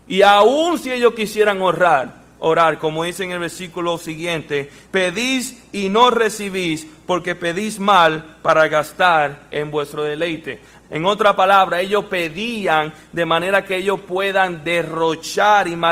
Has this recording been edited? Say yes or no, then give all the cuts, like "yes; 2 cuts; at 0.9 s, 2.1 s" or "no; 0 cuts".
yes; 2 cuts; at 4.8 s, 10.8 s